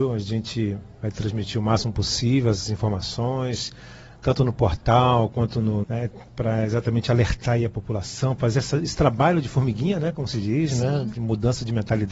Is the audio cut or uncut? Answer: cut